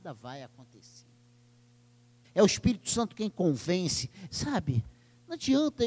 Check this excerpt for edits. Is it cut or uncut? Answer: cut